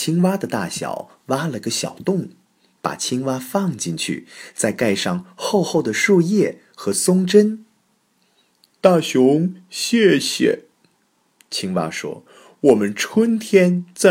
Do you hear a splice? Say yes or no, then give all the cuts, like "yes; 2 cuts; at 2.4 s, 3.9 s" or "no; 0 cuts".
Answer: no; 0 cuts